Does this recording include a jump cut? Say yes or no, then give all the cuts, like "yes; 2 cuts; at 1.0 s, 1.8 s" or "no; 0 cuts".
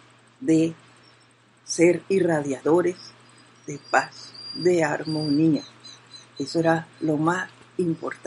no; 0 cuts